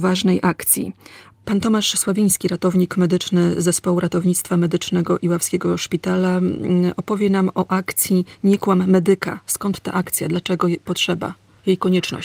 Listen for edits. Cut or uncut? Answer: cut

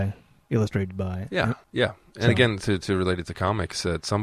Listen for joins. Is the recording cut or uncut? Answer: cut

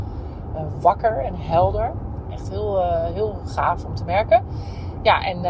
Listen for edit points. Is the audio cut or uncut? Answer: uncut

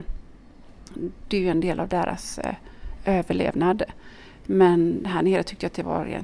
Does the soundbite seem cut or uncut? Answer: uncut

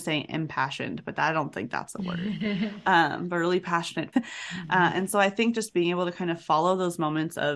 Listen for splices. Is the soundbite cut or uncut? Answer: cut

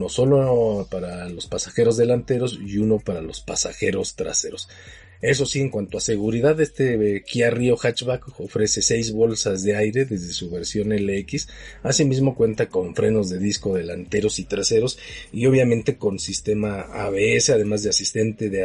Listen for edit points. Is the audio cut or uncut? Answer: uncut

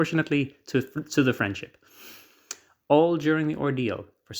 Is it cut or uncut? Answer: uncut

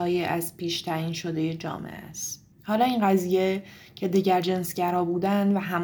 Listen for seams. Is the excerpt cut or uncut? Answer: cut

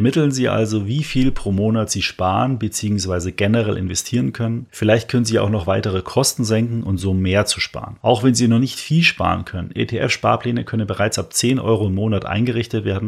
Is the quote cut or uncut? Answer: uncut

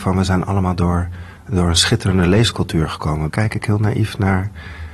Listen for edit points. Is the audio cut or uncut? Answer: cut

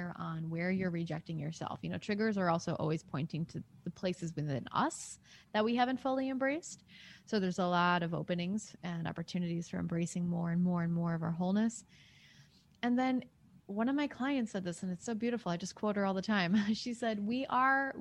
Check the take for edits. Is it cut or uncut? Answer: uncut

